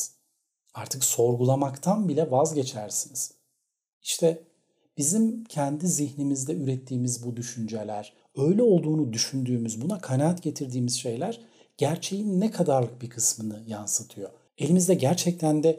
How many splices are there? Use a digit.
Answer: 2